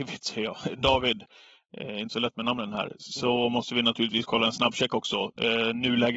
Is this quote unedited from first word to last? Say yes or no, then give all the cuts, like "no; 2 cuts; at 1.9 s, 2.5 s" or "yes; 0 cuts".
yes; 0 cuts